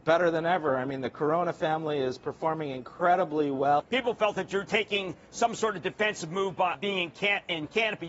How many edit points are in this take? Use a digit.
2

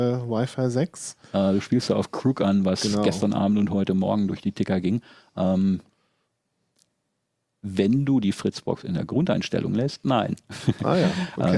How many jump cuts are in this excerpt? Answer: 0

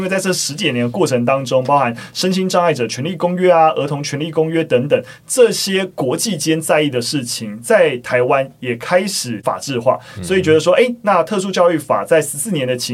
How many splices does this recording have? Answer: 0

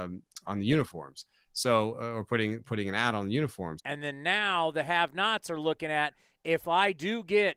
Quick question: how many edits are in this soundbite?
1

